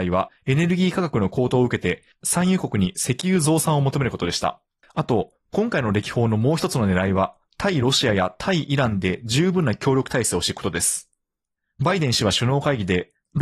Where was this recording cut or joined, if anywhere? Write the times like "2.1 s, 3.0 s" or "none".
4.8 s